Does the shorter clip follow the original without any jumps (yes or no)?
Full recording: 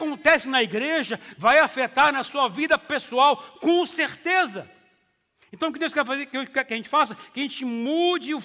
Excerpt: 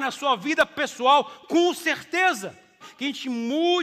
no